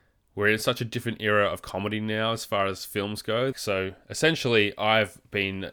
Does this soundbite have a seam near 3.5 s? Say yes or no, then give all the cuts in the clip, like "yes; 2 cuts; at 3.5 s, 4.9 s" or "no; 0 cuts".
yes; 1 cut; at 3.5 s